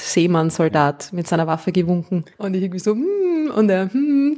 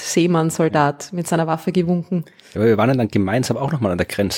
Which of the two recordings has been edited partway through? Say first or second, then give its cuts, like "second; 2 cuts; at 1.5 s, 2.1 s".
first; 1 cut; at 2.3 s